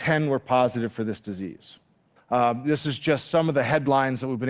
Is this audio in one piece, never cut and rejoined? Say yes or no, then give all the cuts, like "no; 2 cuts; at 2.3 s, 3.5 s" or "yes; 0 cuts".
no; 1 cut; at 2.2 s